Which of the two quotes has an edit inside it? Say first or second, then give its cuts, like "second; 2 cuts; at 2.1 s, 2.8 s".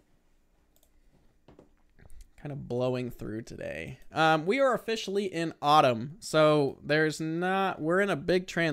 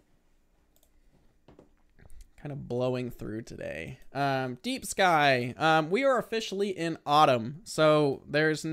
first; 1 cut; at 4.1 s